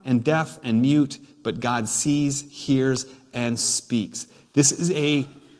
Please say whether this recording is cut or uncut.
uncut